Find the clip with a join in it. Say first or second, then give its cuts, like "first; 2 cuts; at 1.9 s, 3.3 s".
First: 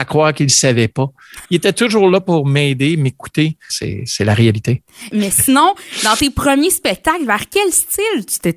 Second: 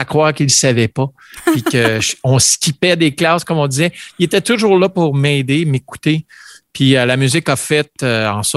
first; 3 cuts; at 1.4 s, 3.7 s, 5.1 s